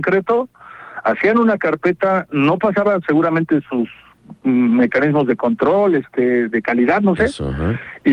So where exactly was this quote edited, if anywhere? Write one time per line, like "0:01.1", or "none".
none

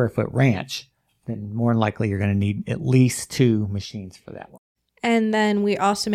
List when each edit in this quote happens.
none

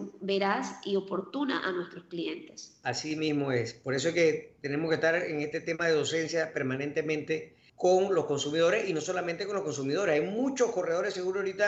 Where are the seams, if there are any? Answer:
0:07.7

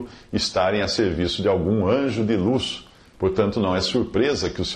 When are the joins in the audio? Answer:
0:03.1

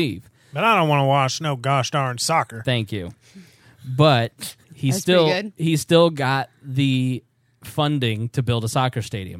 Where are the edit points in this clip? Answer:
0:04.6

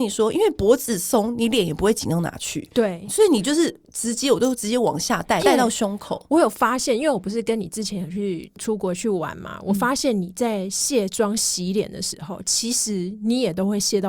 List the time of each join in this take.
0:05.4

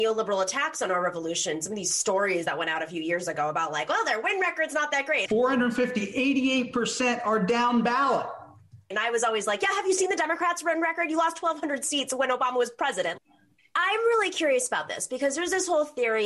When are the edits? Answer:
0:05.3
0:08.9
0:13.2

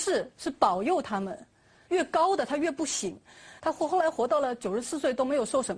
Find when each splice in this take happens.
0:01.9
0:03.6

